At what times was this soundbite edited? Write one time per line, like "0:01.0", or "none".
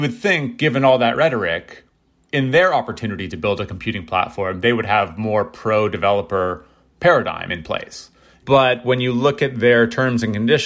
none